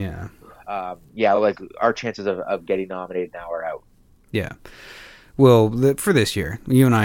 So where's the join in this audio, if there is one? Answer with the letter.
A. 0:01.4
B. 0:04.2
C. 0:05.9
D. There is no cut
D